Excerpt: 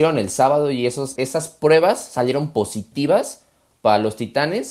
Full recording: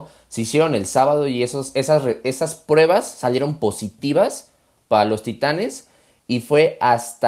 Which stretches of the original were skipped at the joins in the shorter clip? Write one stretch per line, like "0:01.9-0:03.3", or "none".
0:01.7-0:02.2